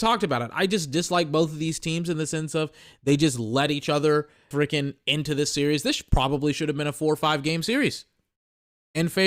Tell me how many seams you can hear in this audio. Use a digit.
1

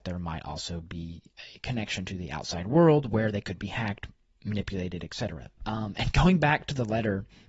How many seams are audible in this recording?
1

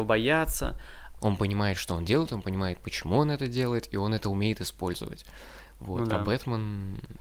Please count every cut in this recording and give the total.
1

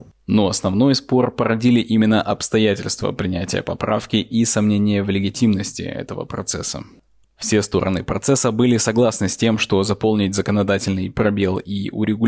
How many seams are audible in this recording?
1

